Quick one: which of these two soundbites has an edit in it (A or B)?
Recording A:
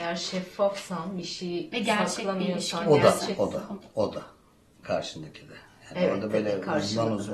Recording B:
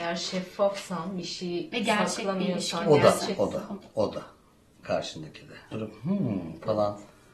B